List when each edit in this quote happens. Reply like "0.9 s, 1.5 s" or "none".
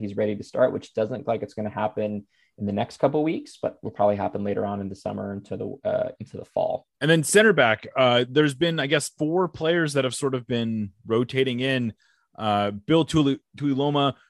6.9 s